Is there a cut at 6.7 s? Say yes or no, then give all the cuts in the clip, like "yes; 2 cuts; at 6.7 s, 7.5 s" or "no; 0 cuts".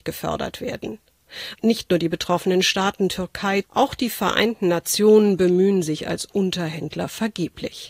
no; 2 cuts; at 1.5 s, 3.6 s